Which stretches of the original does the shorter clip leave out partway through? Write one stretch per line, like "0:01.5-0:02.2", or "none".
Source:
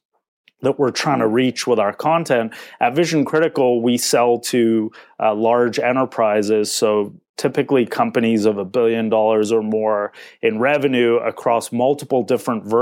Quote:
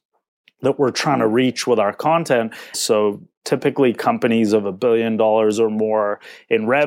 0:02.7-0:06.7